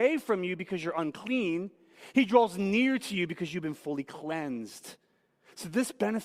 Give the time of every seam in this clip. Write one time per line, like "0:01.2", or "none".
none